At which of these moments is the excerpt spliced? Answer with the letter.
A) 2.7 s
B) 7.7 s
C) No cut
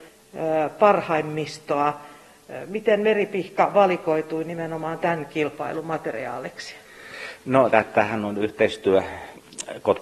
B